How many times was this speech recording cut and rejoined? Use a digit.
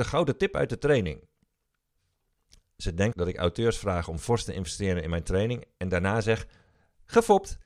1